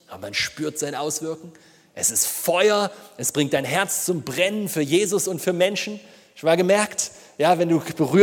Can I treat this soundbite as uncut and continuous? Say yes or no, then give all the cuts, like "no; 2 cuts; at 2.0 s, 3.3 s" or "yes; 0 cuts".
yes; 0 cuts